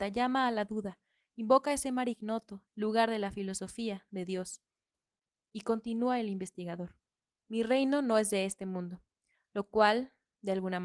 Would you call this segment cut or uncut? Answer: cut